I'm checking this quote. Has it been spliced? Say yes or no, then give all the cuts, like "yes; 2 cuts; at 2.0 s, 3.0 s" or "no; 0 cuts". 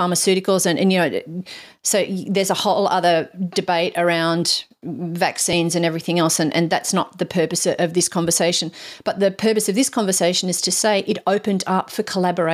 no; 0 cuts